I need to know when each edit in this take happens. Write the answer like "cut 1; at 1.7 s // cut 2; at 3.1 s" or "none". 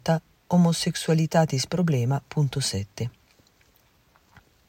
none